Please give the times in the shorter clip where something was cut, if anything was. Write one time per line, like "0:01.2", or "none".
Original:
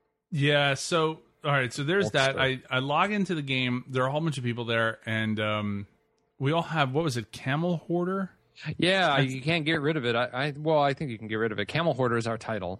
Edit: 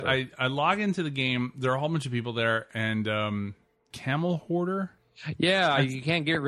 0:03.9